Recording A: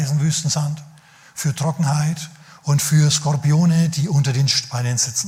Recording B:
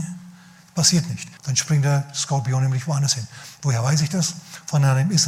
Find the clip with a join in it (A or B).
B